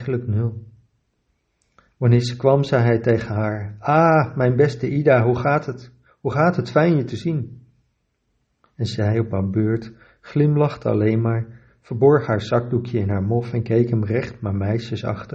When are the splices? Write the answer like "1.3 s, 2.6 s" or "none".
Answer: none